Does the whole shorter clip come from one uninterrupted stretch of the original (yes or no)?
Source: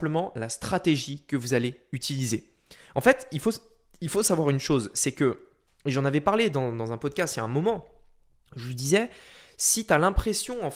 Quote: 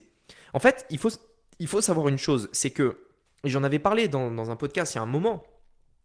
yes